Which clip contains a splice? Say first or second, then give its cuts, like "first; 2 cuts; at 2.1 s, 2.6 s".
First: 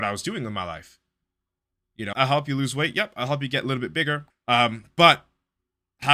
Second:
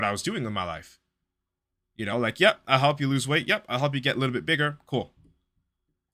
first; 2 cuts; at 2.1 s, 4.3 s